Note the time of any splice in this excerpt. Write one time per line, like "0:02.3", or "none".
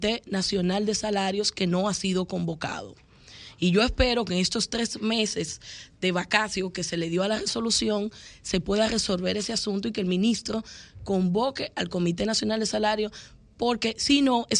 none